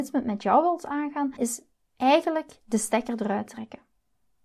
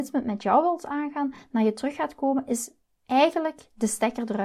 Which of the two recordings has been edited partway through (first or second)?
first